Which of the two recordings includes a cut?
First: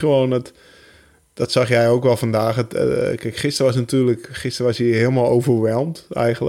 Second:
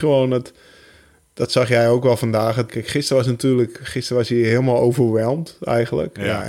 second; 1 cut; at 2.7 s

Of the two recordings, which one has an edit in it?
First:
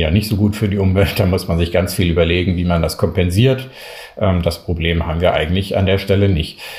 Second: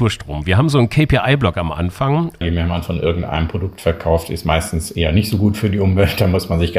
second; 1 cut; at 2.4 s

